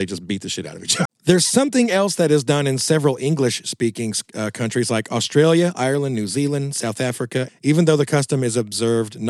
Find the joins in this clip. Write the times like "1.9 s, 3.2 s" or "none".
1.1 s, 7.5 s